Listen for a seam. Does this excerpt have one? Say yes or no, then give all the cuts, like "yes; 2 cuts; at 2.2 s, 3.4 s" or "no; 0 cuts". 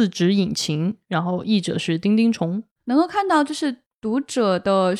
no; 0 cuts